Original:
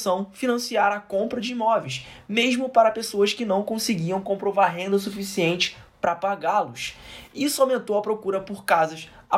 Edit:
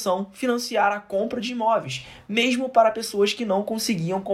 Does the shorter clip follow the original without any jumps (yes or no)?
yes